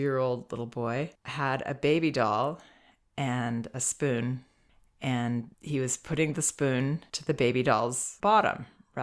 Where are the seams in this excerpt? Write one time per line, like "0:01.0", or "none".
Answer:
none